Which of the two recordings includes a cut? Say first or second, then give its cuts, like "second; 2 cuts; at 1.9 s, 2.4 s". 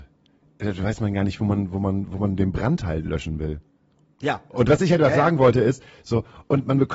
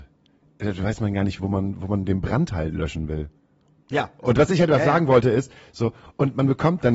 second; 1 cut; at 1.4 s